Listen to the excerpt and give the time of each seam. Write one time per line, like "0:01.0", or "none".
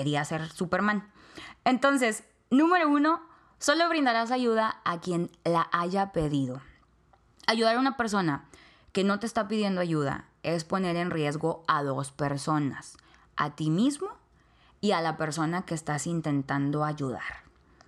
none